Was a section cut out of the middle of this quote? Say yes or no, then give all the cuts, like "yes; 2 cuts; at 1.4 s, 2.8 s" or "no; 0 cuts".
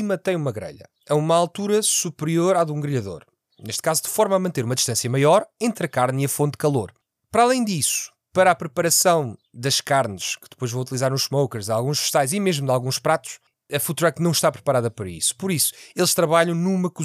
no; 0 cuts